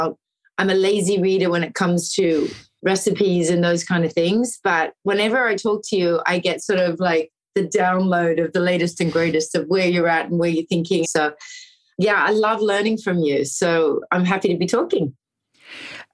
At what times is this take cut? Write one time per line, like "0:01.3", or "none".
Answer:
0:11.0